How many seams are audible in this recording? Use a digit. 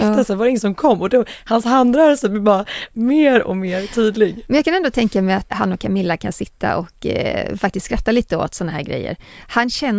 1